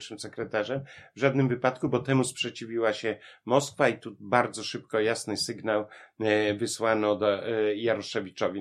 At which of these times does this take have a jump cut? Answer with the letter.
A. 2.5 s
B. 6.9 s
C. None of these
C